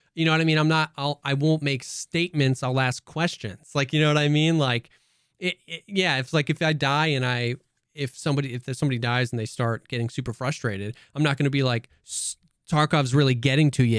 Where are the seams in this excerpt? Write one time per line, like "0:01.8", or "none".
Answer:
none

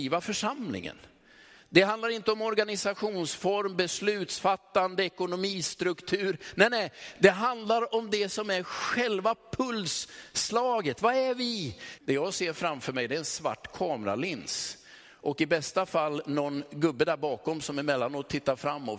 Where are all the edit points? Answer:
0:12.0

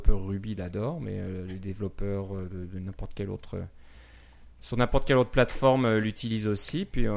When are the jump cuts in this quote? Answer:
none

